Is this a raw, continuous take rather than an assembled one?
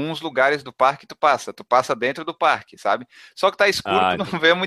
yes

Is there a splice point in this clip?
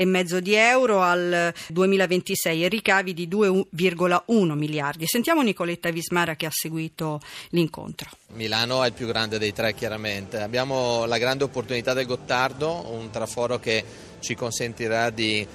yes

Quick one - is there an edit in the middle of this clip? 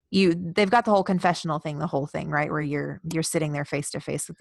no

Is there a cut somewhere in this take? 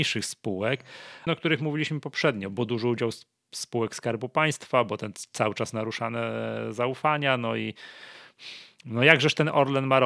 yes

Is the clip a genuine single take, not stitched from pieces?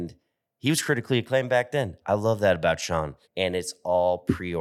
no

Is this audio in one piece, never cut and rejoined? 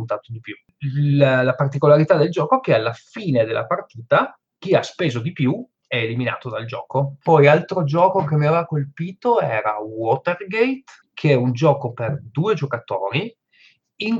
yes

